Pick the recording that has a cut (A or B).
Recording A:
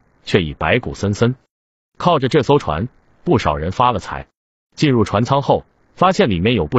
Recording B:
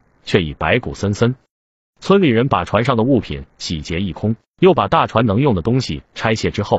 A